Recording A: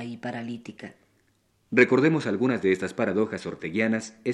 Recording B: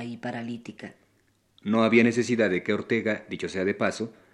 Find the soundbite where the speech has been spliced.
A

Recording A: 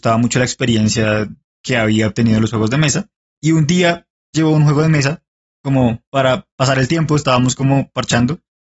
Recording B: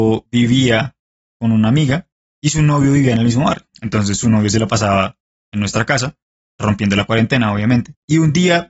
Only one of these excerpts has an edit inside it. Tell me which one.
A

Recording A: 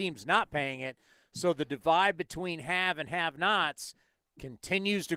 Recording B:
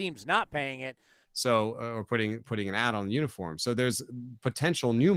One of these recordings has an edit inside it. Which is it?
B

